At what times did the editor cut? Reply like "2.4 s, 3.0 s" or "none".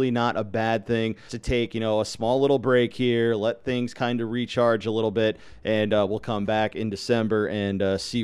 1.3 s